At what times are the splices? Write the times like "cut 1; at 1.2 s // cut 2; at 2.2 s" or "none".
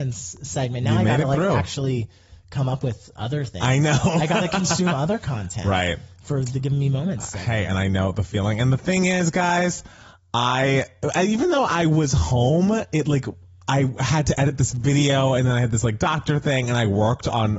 none